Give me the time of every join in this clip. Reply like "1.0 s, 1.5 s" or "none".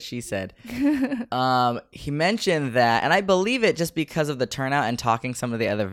none